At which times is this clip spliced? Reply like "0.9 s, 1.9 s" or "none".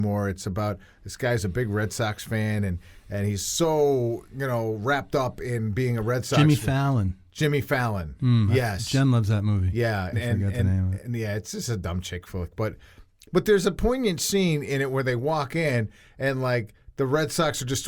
10.1 s